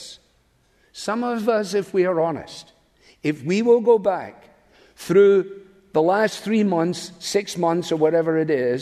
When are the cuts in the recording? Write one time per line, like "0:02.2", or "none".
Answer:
none